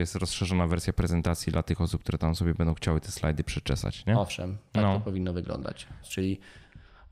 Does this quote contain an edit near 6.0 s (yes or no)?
yes